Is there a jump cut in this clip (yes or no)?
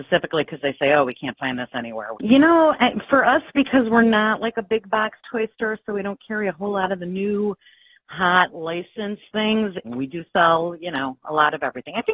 yes